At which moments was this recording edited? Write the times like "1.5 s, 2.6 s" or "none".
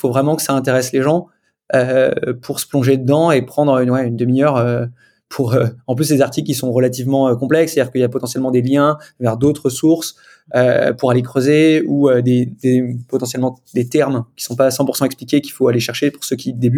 none